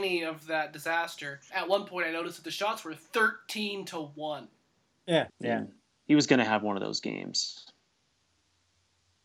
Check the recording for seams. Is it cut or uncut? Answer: cut